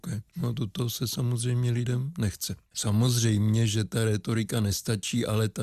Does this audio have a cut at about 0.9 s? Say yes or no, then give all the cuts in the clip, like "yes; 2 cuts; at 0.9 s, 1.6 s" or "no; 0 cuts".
no; 1 cut; at 2.7 s